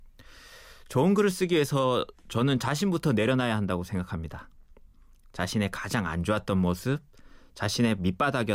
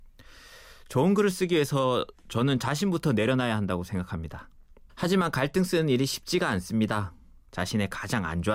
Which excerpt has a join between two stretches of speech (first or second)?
second